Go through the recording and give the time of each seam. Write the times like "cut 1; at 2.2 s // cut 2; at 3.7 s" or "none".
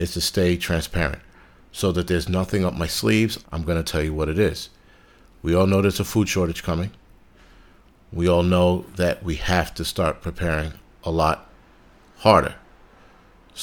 cut 1; at 3.4 s